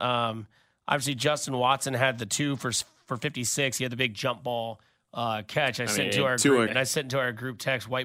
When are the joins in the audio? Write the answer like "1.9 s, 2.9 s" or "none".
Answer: 6.7 s